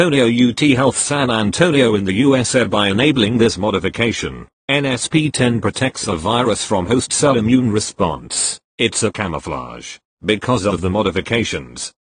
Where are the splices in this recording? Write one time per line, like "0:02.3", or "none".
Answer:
none